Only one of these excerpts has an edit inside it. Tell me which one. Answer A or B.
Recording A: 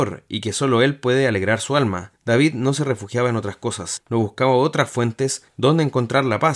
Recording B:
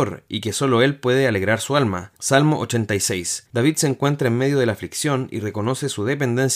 B